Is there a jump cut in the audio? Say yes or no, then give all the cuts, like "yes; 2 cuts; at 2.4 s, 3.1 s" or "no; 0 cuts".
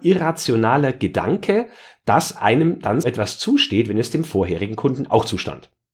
yes; 1 cut; at 3.0 s